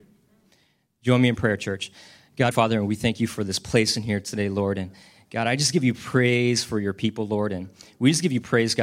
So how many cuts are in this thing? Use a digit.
1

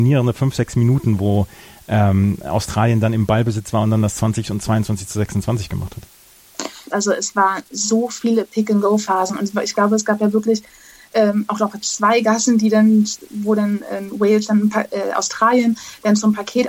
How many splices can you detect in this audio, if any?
1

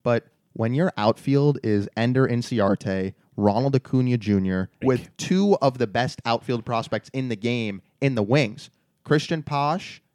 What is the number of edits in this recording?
1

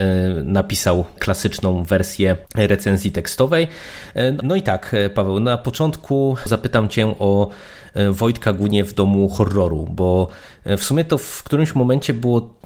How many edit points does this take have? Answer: 1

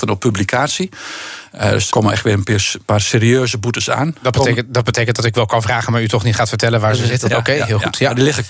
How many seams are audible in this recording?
2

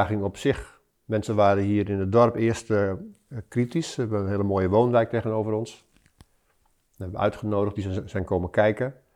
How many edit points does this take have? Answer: 0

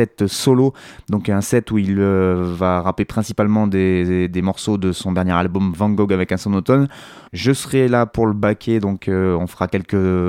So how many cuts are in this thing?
1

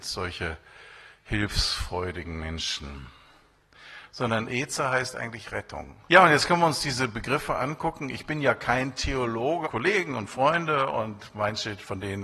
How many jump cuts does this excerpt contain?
2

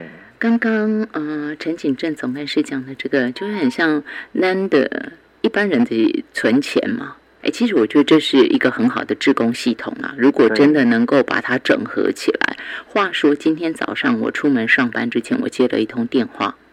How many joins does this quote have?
1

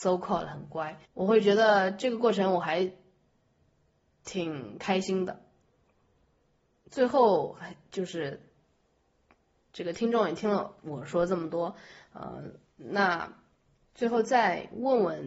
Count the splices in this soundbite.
1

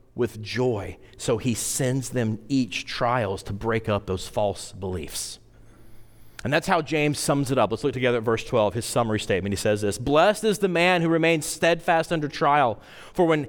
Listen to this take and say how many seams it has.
0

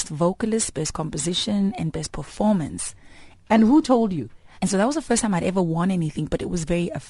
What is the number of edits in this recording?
2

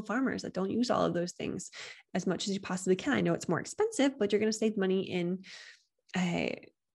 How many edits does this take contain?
0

